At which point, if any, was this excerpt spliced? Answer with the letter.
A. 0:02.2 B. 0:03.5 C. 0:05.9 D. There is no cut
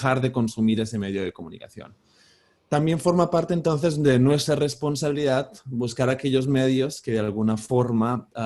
D